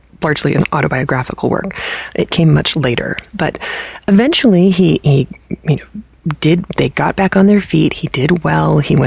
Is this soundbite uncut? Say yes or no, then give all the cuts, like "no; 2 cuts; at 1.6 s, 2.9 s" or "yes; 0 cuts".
no; 1 cut; at 3.3 s